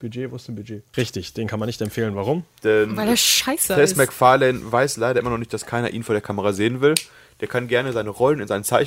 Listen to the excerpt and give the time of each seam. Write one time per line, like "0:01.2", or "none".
0:00.9